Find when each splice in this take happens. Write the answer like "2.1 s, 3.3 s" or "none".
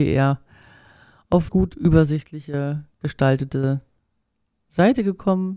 1.5 s